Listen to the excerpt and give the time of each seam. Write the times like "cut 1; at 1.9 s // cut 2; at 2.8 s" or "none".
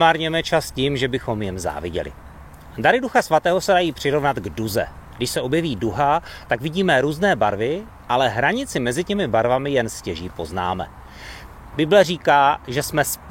cut 1; at 11.7 s